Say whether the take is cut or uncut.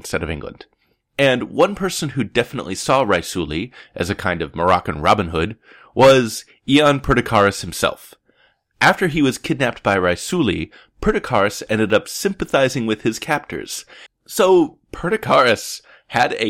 cut